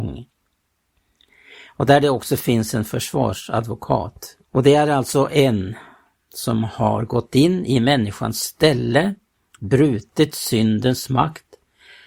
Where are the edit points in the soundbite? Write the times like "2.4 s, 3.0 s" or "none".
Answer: 4.4 s